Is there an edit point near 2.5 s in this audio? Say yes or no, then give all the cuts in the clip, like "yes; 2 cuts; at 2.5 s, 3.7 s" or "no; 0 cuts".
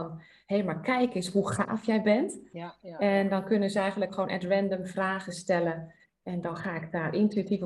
no; 0 cuts